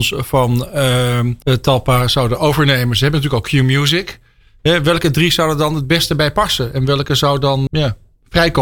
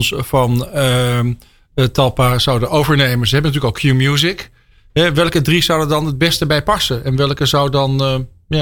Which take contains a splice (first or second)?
first